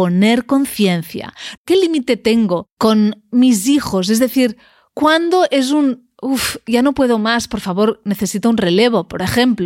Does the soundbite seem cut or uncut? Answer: cut